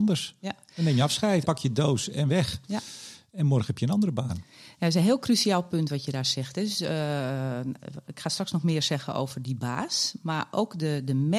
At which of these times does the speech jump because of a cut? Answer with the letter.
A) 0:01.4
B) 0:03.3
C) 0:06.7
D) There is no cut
A